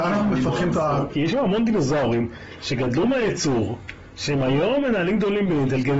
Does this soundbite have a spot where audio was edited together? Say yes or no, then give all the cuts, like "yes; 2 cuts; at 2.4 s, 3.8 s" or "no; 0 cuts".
yes; 1 cut; at 1.1 s